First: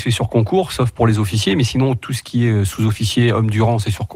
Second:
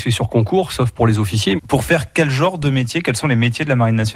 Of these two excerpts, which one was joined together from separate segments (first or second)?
second